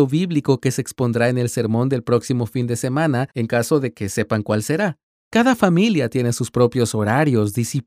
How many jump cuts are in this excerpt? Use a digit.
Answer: 1